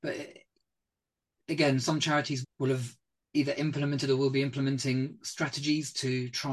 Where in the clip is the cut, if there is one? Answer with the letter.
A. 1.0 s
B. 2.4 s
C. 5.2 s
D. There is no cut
B